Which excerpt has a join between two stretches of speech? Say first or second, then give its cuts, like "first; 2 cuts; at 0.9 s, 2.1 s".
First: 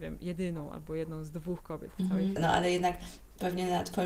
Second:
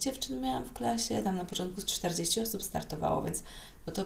first; 1 cut; at 2.4 s